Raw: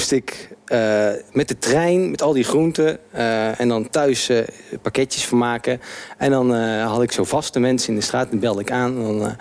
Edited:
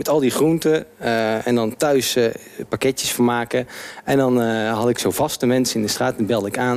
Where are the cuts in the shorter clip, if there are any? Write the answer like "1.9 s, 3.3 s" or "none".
none